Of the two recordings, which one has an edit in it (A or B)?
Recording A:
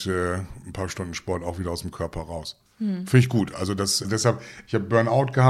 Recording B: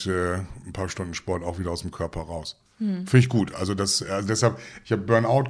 A